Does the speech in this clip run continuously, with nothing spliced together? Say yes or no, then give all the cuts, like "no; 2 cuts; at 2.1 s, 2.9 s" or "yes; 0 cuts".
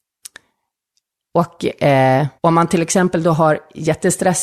no; 2 cuts; at 1.2 s, 2.4 s